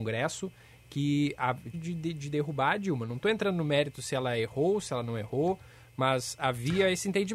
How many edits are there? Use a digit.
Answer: 1